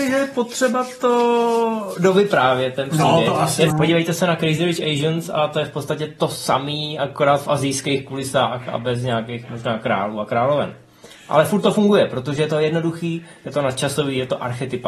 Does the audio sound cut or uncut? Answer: cut